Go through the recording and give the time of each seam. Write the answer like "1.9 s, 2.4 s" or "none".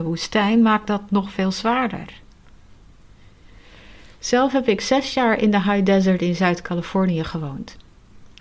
none